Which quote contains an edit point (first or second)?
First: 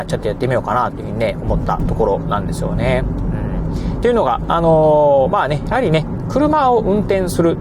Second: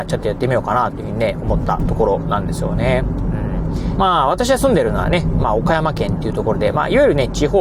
second